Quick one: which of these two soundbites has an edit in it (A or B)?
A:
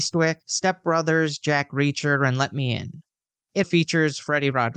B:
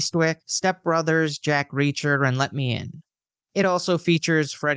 A